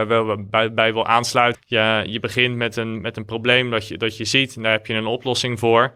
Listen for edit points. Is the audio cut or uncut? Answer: cut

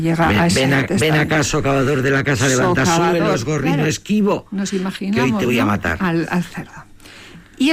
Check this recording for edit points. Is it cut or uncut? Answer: uncut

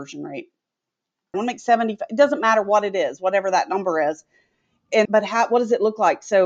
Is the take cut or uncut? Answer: cut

